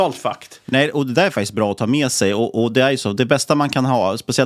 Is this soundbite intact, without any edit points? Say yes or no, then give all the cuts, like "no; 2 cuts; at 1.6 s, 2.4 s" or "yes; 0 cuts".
yes; 0 cuts